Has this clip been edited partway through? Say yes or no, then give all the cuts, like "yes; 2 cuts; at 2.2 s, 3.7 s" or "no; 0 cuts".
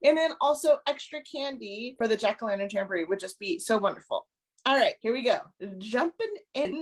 no; 0 cuts